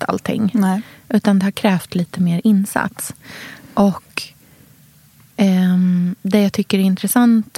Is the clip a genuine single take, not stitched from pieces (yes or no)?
yes